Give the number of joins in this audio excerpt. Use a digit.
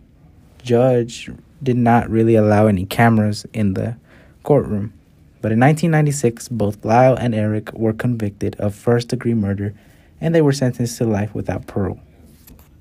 0